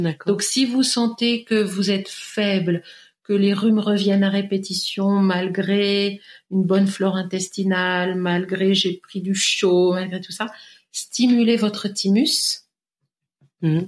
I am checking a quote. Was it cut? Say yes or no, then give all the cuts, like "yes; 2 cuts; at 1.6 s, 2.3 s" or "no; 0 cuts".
no; 0 cuts